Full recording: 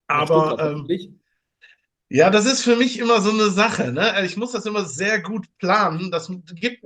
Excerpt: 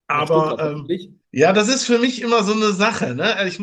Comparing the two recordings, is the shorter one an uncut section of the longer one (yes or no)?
no